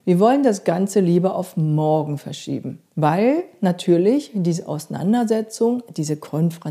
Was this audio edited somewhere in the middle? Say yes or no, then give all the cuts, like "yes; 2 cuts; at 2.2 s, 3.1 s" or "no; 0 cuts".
yes; 1 cut; at 2.9 s